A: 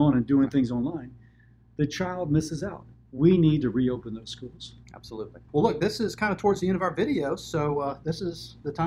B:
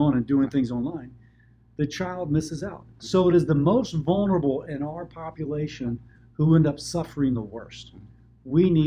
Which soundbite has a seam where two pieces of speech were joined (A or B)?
A